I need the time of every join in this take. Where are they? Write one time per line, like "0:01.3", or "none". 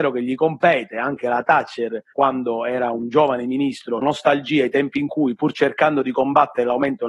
0:02.1
0:04.0